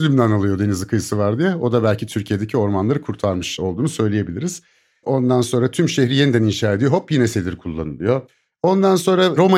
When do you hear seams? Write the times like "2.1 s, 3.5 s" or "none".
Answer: 5.0 s